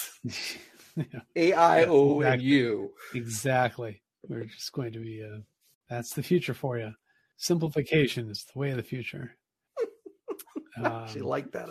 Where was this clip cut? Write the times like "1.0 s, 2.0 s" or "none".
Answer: none